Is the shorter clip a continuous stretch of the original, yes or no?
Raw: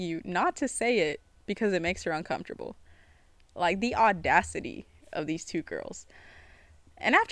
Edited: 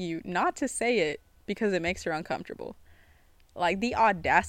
yes